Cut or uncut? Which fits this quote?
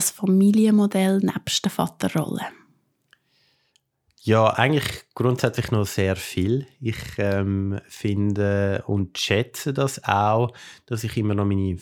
uncut